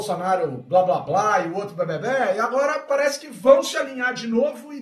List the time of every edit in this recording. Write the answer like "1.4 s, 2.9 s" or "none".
none